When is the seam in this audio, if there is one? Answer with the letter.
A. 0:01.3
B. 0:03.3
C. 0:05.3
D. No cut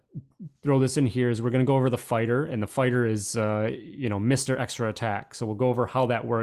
D